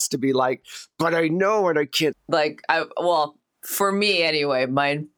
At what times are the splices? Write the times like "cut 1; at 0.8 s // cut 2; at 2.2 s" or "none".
cut 1; at 2.1 s